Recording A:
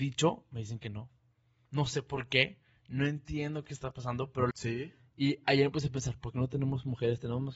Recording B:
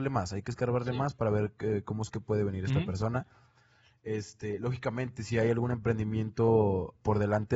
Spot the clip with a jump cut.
A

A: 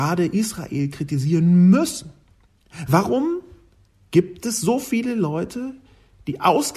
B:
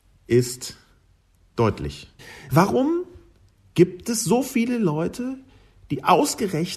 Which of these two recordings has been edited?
B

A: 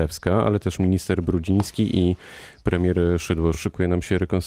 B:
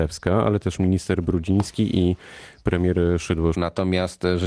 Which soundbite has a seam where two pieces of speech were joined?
B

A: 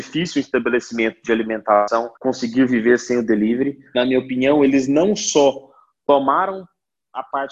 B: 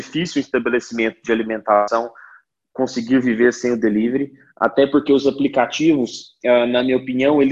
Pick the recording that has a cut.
A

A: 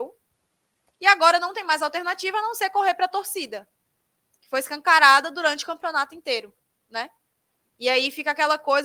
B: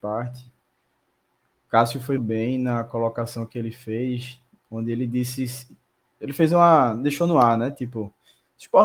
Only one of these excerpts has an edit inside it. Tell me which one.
B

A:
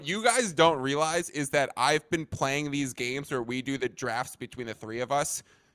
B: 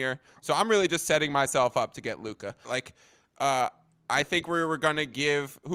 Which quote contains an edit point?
B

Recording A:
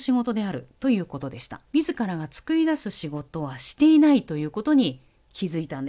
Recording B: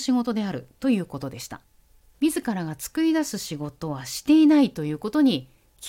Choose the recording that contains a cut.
A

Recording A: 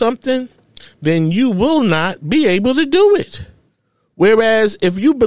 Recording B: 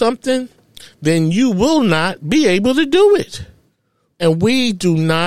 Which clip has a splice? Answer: B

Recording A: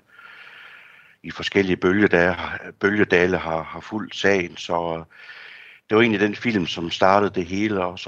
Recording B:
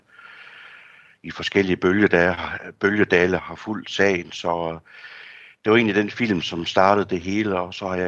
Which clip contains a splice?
B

